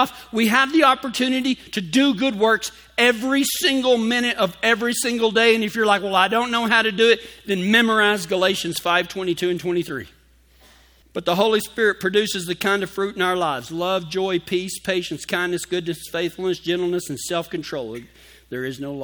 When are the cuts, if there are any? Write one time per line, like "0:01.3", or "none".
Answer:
none